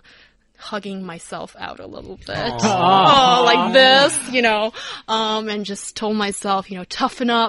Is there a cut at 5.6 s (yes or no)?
no